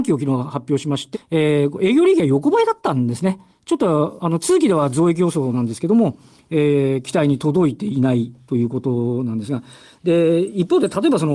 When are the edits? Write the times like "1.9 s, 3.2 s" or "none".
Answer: 1.1 s